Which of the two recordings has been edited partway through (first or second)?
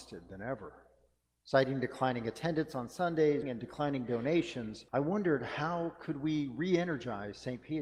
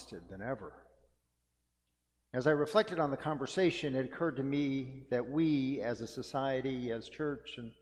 first